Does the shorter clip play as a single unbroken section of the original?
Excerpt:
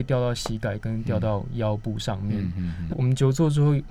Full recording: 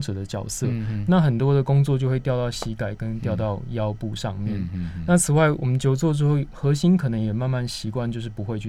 no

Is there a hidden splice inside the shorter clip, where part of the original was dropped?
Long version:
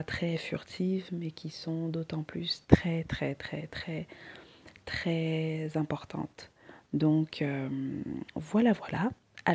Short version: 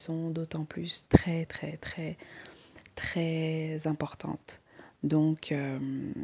yes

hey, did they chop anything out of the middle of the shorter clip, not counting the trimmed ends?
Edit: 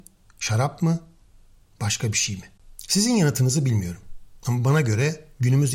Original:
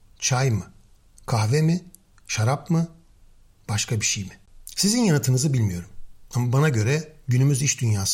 no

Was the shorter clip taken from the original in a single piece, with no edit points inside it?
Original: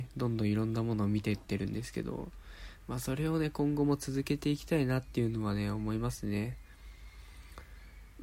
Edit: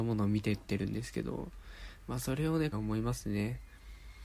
no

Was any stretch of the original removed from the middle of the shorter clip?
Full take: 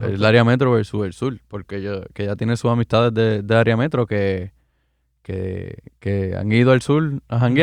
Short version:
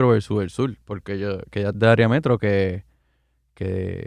yes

